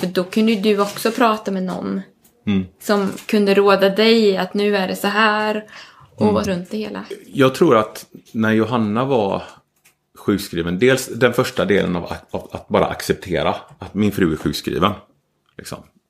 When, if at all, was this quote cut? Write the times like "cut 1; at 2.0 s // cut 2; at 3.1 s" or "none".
cut 1; at 6.4 s